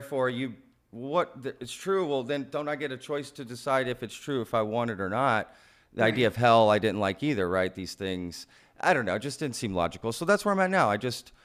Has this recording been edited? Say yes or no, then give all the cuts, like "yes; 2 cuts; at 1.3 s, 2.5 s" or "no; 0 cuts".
no; 0 cuts